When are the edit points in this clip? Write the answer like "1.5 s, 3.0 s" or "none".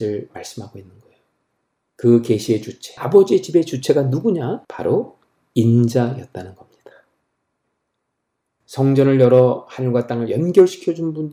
3.0 s, 4.6 s